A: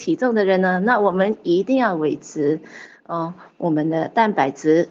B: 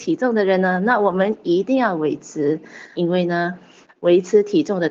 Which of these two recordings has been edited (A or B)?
B